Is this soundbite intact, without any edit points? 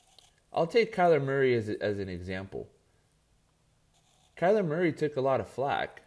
no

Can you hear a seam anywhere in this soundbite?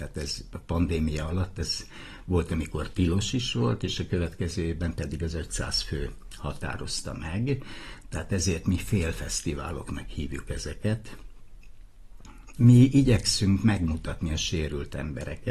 yes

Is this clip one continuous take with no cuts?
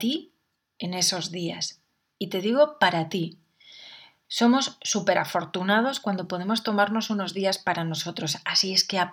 no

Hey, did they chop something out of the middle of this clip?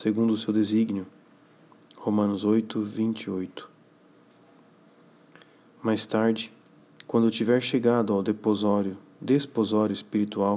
no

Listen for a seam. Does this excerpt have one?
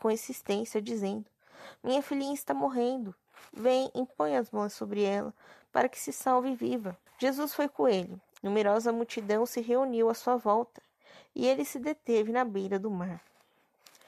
yes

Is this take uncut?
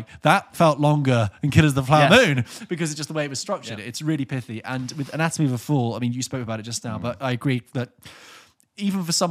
yes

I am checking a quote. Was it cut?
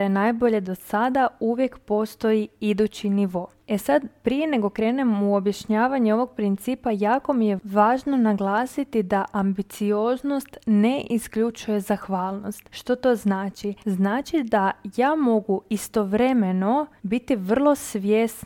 yes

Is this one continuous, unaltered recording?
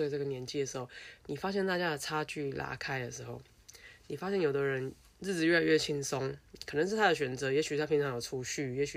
yes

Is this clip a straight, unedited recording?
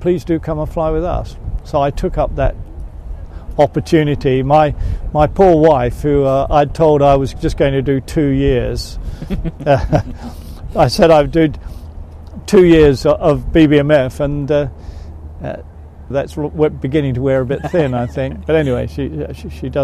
no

